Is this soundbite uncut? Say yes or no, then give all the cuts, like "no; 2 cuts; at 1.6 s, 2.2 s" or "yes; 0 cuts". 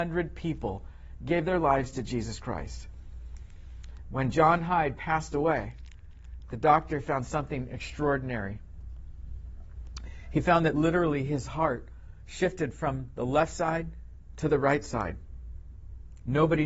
yes; 0 cuts